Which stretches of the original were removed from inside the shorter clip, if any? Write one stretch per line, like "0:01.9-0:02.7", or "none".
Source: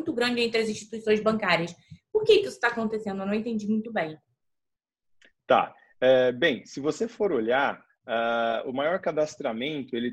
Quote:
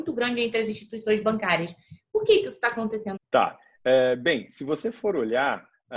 0:03.2-0:05.3